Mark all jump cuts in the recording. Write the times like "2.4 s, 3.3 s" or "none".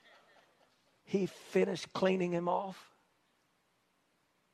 1.0 s

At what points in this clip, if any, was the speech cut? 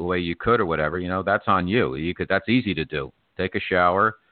none

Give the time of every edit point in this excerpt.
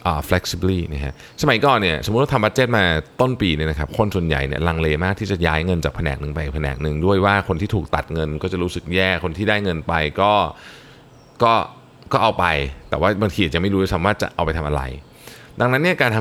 none

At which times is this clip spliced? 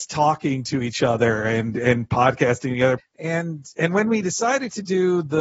3.0 s

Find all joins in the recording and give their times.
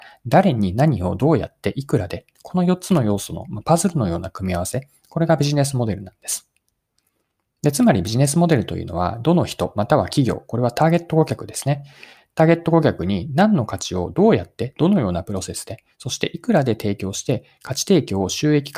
none

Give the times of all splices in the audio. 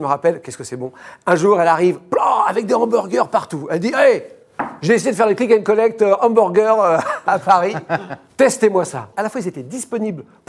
9.1 s

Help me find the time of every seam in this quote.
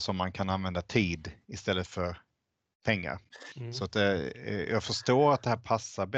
3.5 s

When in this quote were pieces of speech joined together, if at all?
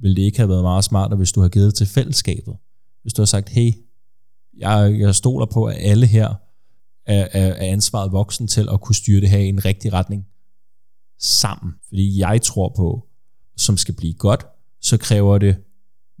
11.8 s, 13.4 s

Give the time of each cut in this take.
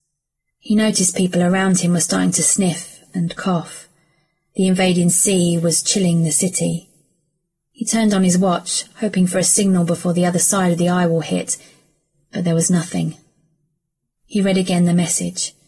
none

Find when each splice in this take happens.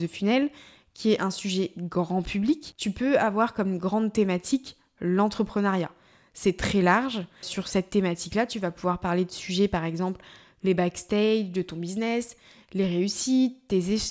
7.4 s

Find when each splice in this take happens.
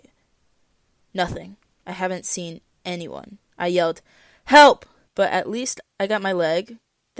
1.8 s, 5.1 s

